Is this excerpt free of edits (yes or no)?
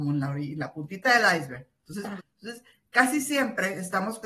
no